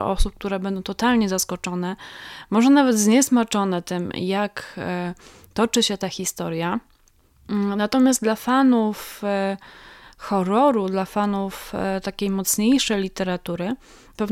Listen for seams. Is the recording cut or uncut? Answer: uncut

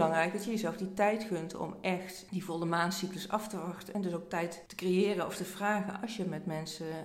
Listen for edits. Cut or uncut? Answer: uncut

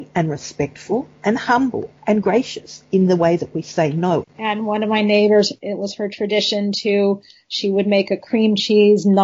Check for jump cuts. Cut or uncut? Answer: cut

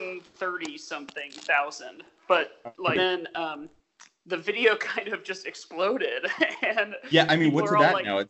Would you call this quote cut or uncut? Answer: cut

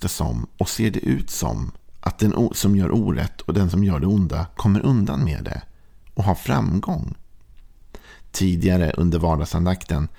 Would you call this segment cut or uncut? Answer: uncut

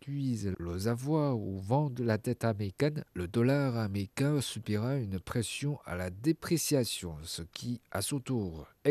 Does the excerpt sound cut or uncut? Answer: uncut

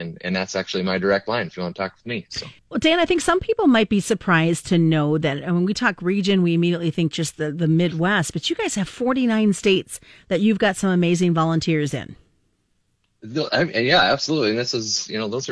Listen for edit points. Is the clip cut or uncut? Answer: cut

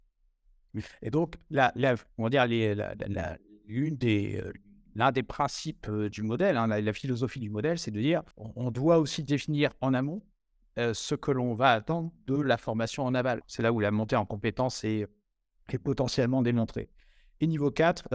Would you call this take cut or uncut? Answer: cut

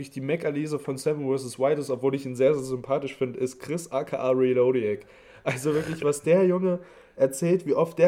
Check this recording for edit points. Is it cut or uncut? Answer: uncut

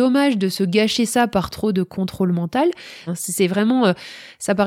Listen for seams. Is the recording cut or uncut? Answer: cut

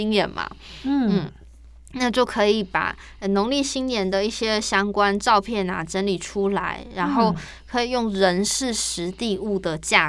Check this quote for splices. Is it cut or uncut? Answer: uncut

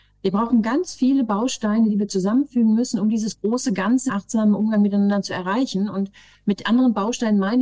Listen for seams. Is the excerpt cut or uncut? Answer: cut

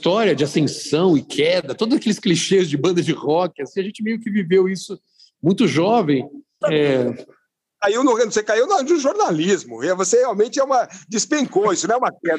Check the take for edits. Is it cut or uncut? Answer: cut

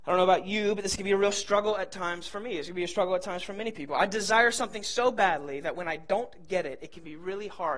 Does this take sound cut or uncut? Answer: uncut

